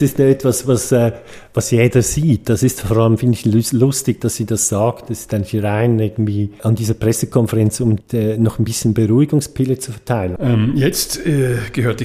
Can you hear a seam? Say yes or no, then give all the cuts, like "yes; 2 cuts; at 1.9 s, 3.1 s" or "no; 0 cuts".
yes; 2 cuts; at 8.0 s, 10.4 s